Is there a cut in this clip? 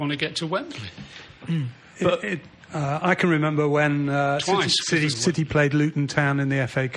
yes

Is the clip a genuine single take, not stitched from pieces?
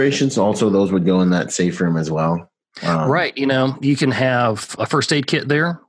no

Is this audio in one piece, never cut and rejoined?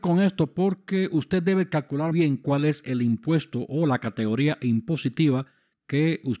no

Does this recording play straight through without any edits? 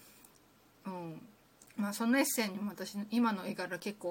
no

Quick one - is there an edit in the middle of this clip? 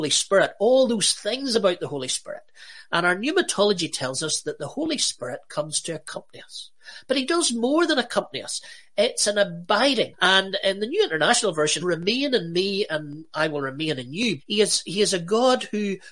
yes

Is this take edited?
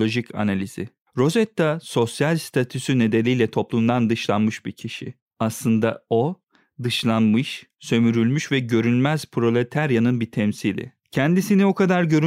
no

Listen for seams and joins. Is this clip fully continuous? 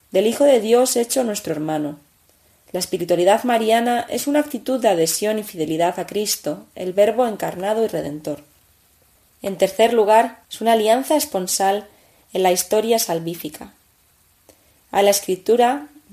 no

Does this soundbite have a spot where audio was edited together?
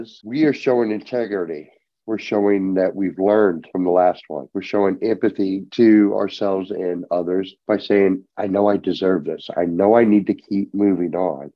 no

